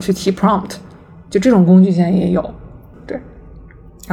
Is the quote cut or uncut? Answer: cut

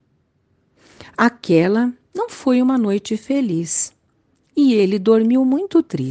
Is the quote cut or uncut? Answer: uncut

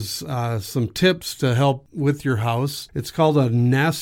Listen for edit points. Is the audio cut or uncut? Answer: cut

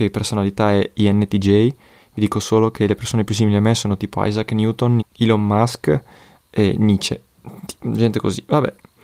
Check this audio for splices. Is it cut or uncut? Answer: cut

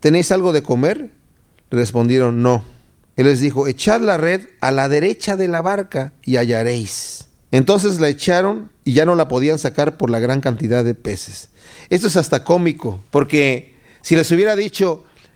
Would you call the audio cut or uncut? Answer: uncut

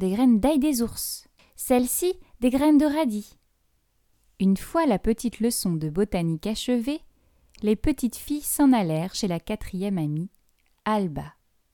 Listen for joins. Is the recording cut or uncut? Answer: uncut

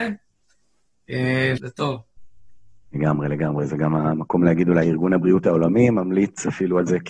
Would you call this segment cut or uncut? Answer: cut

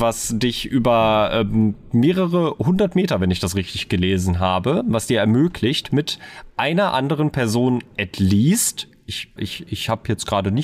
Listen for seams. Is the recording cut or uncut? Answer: cut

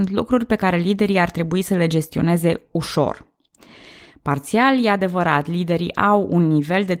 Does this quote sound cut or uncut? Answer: uncut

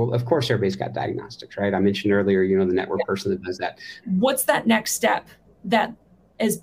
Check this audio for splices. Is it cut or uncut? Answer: cut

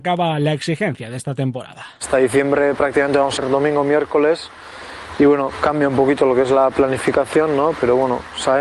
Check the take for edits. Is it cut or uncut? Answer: cut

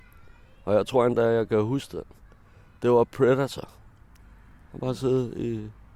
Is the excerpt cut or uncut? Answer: uncut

